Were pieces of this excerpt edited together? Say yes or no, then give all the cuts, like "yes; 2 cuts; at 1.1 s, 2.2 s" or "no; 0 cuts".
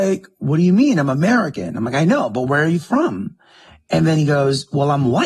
no; 0 cuts